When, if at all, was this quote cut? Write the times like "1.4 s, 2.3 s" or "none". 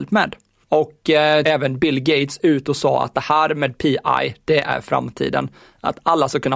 1.5 s